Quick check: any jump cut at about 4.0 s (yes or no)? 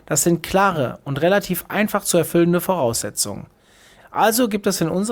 yes